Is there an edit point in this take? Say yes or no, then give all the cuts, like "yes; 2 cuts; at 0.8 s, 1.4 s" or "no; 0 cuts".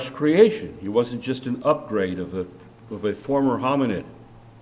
no; 0 cuts